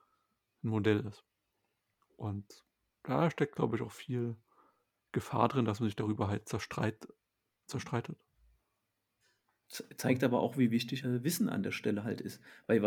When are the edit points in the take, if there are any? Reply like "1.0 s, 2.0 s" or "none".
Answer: 11.0 s